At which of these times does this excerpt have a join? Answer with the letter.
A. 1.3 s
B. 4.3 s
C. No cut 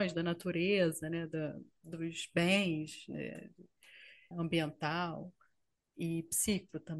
B